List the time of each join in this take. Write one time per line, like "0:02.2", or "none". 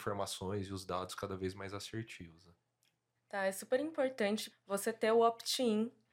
0:03.2
0:04.5